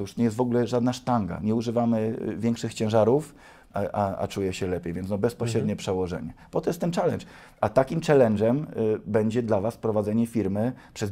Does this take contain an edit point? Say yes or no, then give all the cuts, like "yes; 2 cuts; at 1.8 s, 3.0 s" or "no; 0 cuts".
yes; 1 cut; at 3.7 s